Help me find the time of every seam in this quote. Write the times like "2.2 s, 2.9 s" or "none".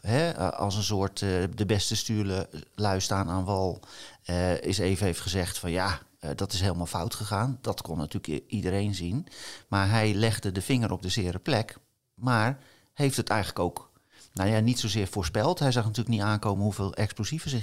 none